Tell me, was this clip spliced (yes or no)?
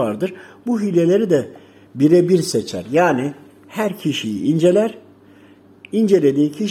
no